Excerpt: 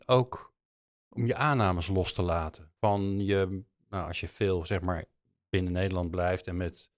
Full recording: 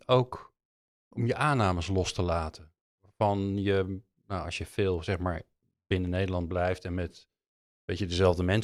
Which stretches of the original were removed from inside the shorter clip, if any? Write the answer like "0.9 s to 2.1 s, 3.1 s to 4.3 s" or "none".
2.8 s to 3.1 s